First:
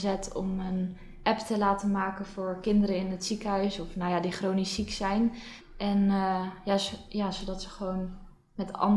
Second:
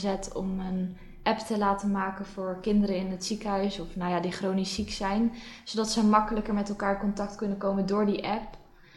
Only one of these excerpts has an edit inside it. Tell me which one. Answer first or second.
first